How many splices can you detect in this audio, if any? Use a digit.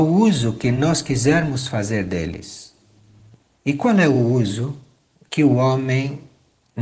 0